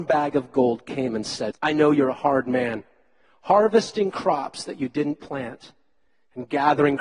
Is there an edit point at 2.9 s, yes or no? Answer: no